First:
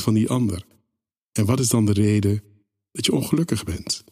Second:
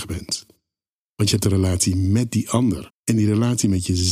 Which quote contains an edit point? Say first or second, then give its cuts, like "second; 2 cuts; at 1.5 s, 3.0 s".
second; 1 cut; at 2.9 s